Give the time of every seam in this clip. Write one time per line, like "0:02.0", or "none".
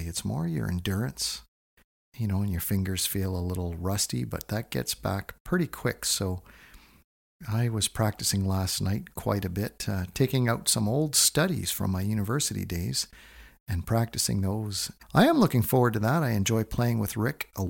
0:15.0